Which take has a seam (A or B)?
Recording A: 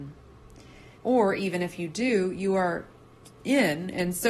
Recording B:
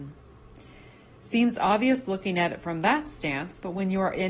A